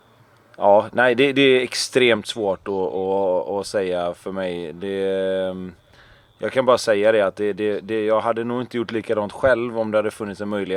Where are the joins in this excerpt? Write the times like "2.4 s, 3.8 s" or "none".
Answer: none